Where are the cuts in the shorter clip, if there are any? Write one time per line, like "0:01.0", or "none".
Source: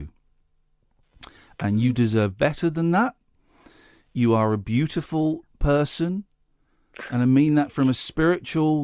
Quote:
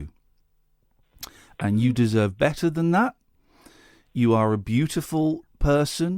none